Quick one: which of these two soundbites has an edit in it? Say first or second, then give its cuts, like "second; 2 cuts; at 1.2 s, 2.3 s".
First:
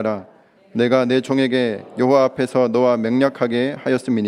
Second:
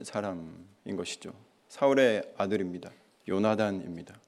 second; 1 cut; at 3.1 s